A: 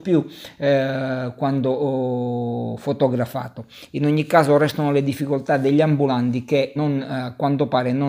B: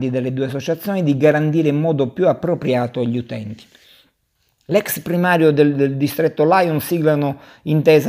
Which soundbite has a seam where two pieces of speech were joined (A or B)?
A